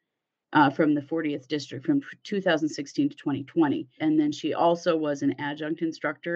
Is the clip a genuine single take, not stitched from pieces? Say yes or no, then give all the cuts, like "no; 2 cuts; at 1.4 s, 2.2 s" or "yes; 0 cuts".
no; 1 cut; at 4.0 s